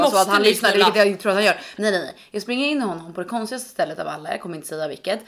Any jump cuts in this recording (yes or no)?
yes